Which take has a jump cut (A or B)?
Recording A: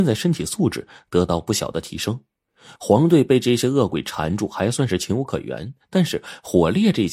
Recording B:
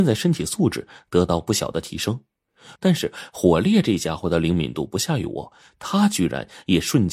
B